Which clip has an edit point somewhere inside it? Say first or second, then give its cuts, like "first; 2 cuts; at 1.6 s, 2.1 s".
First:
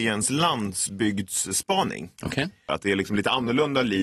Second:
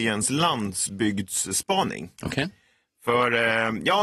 first; 1 cut; at 2.7 s